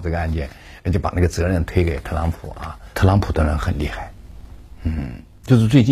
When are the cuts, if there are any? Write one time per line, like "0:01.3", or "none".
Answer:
0:02.9